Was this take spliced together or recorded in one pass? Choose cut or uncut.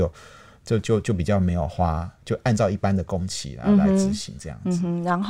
uncut